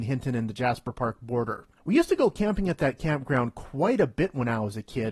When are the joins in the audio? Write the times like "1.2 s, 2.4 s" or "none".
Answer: 1.8 s